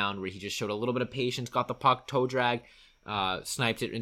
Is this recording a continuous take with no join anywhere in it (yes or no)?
yes